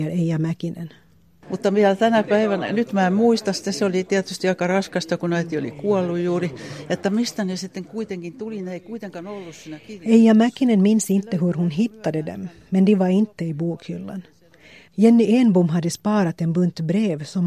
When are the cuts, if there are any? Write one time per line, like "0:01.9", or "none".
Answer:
0:01.4
0:14.9